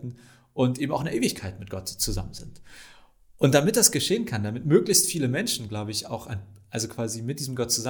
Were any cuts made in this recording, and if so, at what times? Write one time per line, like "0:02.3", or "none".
none